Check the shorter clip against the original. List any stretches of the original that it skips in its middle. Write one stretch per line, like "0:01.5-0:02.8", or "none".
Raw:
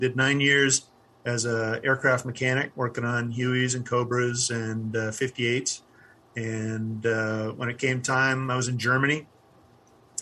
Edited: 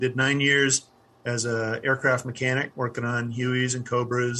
none